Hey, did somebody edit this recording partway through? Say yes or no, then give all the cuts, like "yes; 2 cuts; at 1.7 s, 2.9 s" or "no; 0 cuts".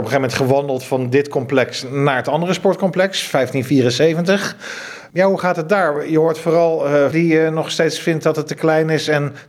yes; 1 cut; at 7.1 s